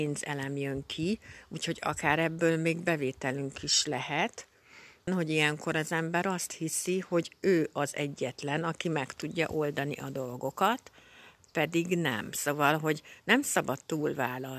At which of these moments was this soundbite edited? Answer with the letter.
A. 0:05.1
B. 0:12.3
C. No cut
A